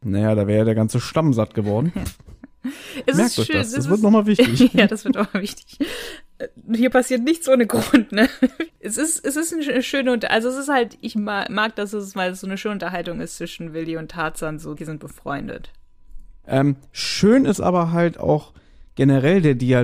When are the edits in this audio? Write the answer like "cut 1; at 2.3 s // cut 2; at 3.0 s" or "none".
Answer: cut 1; at 8.7 s // cut 2; at 14.8 s // cut 3; at 16.4 s